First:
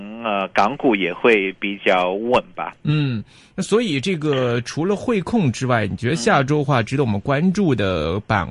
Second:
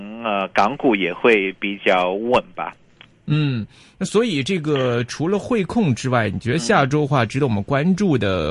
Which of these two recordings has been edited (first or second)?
first